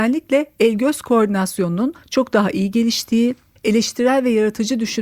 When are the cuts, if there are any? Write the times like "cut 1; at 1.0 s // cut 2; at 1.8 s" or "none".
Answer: cut 1; at 3.6 s